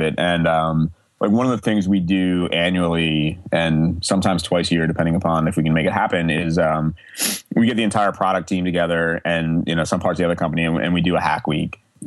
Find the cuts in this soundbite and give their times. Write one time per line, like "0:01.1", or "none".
none